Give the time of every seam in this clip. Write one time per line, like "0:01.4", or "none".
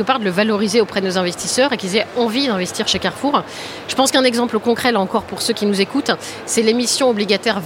none

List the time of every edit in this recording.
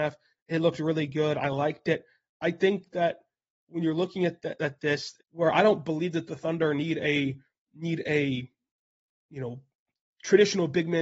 0:05.2

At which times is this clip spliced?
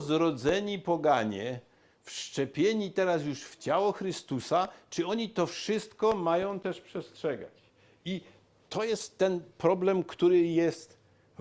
none

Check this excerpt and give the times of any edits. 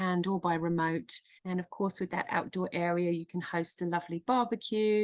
0:01.4

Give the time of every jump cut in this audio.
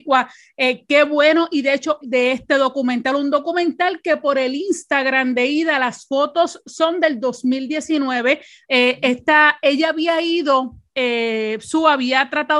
0:02.0
0:08.6

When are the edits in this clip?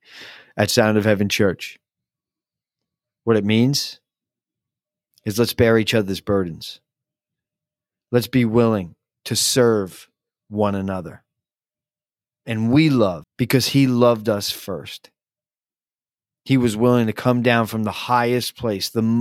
0:13.2

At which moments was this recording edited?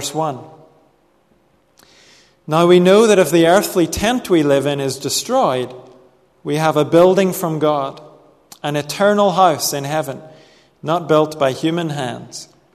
none

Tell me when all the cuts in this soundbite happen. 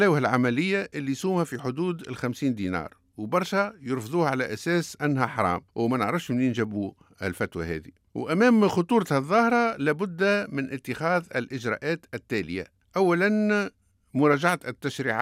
0:05.7

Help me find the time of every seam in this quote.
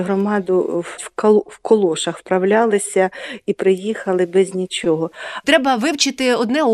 0:01.0
0:05.4

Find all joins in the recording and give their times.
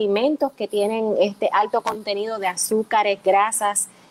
none

